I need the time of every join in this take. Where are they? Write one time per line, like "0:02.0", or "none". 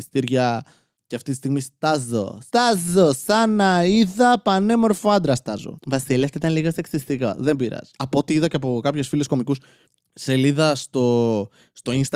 none